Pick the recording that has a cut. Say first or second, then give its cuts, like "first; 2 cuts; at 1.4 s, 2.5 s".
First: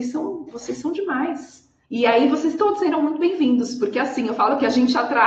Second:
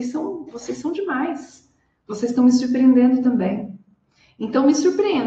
first; 1 cut; at 1.8 s